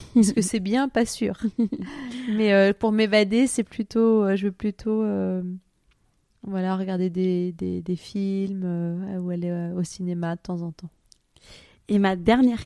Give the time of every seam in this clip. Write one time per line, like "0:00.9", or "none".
none